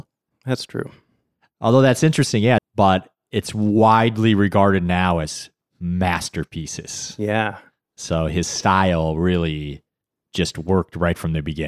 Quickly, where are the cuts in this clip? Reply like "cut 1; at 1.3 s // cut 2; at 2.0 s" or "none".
cut 1; at 2.6 s